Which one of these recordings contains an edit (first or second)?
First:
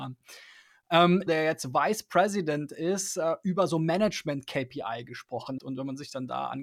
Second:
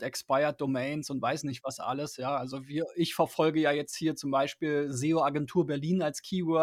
first